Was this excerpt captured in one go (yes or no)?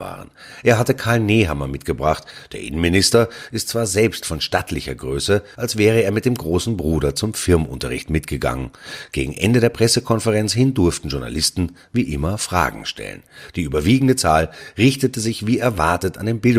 no